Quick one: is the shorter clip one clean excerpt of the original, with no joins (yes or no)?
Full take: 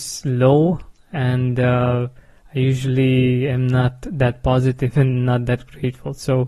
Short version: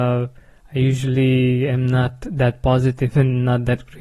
yes